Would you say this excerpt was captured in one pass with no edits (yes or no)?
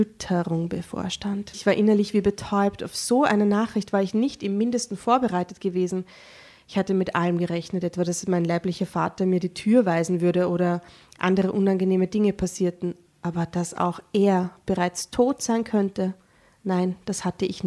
no